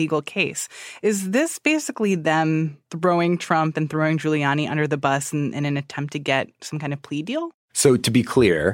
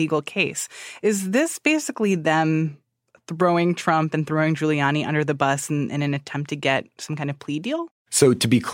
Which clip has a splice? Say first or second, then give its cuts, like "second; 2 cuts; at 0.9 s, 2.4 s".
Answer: first; 1 cut; at 2.8 s